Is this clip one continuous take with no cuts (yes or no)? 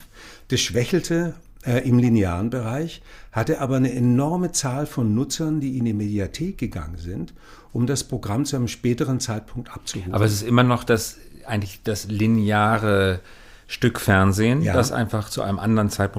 yes